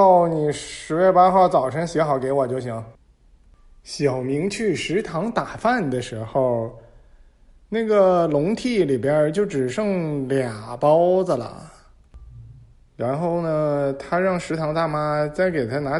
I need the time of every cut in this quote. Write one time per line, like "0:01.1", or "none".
0:03.0